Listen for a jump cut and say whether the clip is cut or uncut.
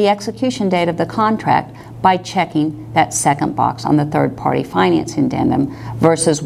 uncut